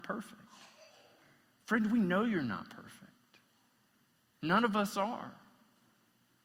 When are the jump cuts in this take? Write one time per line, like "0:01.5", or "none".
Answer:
none